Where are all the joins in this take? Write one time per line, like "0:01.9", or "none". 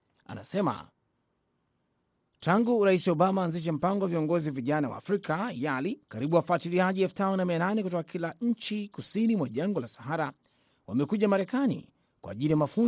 0:06.0